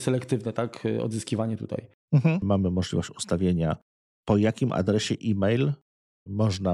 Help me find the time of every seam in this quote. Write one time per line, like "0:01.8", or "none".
0:02.4